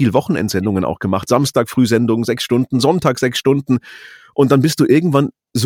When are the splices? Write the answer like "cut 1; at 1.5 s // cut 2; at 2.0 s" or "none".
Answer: none